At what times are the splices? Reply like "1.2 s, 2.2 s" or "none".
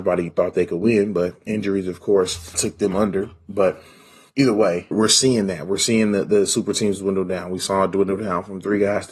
none